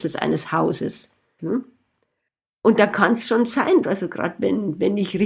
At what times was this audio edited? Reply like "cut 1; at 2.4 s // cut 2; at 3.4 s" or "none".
cut 1; at 1.4 s // cut 2; at 3.8 s